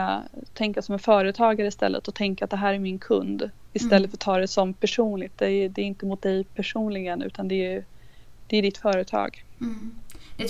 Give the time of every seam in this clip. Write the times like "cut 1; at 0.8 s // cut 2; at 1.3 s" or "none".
none